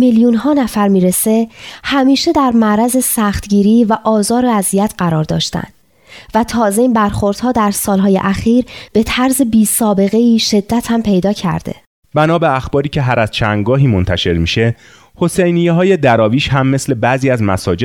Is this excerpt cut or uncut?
uncut